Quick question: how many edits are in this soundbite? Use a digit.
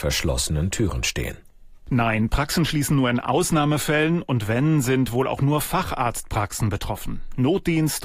0